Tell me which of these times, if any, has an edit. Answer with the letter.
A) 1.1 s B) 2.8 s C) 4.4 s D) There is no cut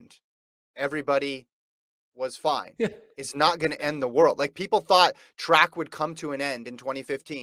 B